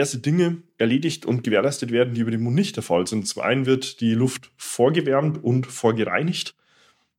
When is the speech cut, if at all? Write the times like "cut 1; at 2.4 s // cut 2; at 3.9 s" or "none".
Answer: none